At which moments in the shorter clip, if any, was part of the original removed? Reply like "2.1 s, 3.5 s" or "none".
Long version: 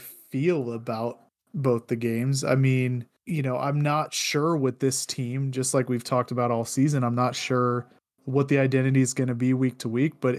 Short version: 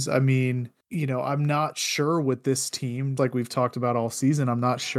3.2 s